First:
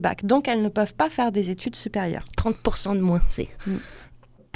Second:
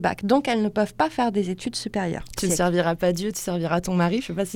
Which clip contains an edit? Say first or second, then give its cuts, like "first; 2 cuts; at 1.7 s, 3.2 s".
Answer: second; 1 cut; at 2.4 s